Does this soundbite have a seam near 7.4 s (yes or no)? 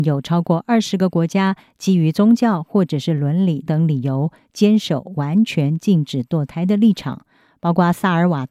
no